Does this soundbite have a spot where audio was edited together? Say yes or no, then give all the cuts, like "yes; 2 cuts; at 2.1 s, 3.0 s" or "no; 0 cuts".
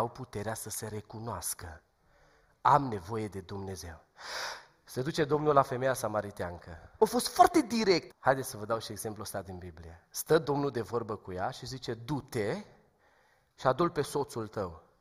yes; 2 cuts; at 7.0 s, 8.1 s